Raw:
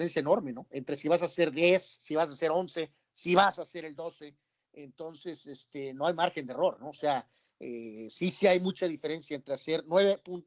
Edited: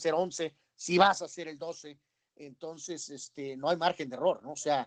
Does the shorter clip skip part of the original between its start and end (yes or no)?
no